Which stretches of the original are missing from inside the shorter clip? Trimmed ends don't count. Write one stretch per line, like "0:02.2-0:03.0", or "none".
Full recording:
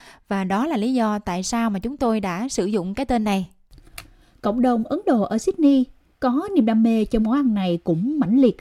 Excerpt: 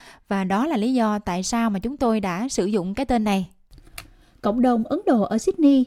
none